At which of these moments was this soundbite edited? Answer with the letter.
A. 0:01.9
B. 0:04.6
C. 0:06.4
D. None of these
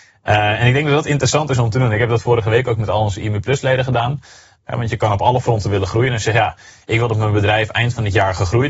B